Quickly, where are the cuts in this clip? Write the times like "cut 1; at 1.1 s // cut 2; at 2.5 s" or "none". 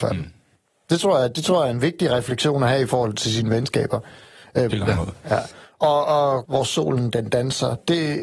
cut 1; at 4.7 s // cut 2; at 6.4 s